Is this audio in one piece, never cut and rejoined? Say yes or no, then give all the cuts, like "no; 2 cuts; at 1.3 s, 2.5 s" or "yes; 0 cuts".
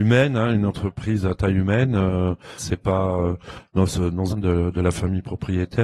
no; 2 cuts; at 2.6 s, 4.3 s